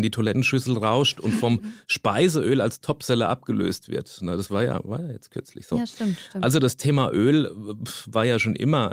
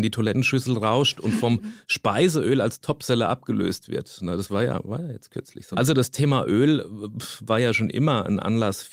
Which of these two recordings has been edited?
second; 1 cut; at 5.7 s

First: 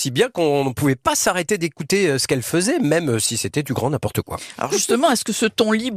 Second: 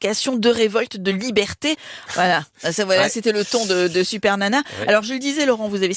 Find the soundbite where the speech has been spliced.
second; 1 cut; at 2.1 s

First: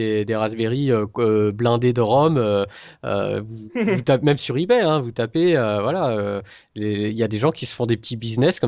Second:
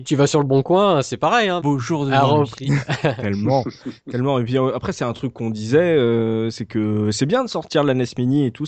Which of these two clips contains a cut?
second; 1 cut; at 1.6 s

